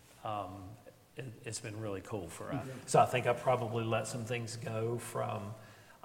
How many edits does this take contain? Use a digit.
1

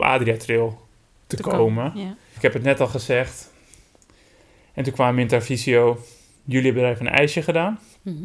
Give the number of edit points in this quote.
1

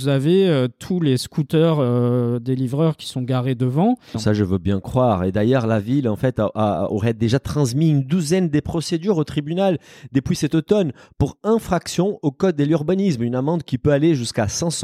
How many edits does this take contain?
1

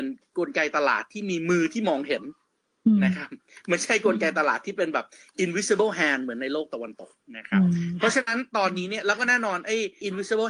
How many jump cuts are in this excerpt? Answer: 0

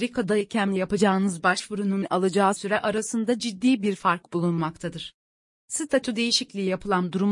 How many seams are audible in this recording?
0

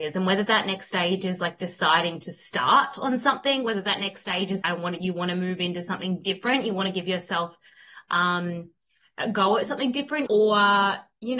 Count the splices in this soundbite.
2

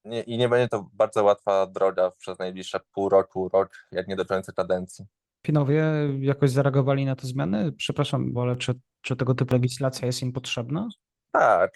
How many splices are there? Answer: 1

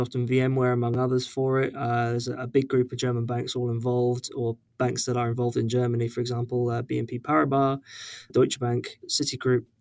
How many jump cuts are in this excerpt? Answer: 0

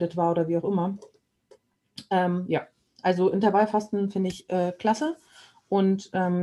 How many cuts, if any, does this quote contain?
0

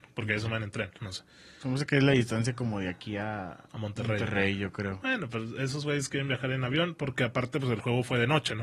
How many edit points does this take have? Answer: 1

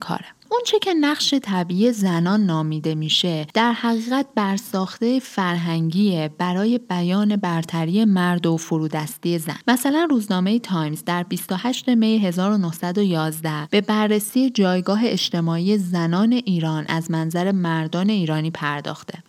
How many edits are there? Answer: 1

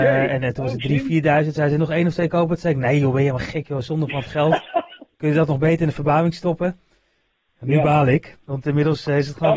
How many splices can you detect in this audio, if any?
0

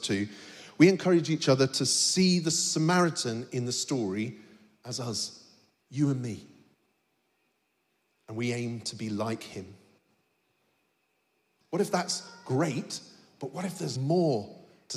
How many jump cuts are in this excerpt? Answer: 2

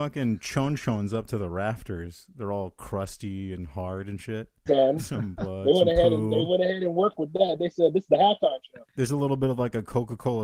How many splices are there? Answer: 1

